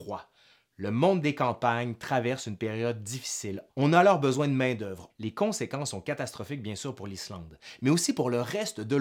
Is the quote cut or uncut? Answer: cut